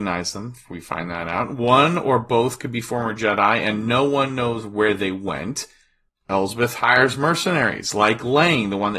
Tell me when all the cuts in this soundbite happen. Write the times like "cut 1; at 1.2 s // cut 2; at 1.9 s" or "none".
cut 1; at 6.1 s